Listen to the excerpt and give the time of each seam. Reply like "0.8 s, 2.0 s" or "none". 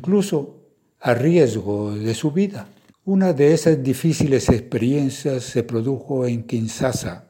none